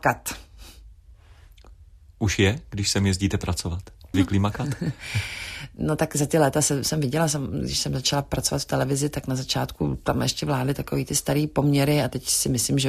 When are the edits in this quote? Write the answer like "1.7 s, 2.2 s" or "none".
4.1 s